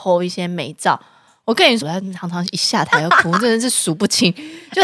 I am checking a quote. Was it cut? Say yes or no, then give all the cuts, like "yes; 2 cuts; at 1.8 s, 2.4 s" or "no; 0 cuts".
yes; 1 cut; at 1.8 s